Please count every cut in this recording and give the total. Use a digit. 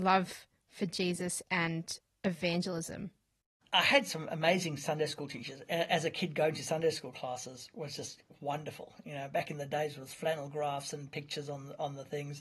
0